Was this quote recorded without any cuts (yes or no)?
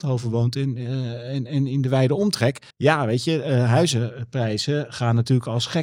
no